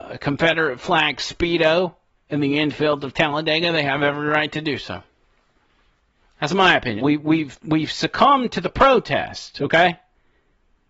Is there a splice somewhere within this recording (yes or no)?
yes